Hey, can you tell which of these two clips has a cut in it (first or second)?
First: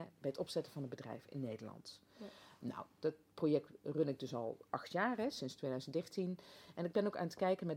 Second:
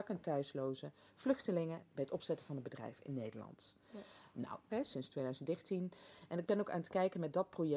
second